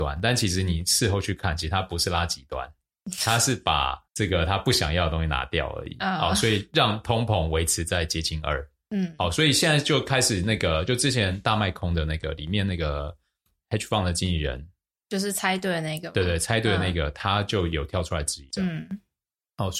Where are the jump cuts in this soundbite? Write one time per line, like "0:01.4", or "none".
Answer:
0:04.1
0:18.5